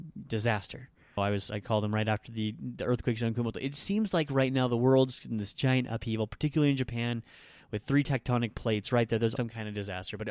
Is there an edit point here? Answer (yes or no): yes